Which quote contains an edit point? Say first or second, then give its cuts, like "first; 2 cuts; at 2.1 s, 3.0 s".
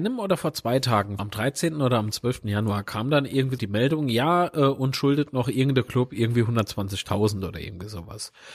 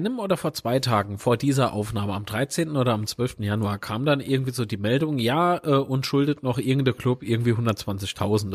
first; 2 cuts; at 1.2 s, 3.6 s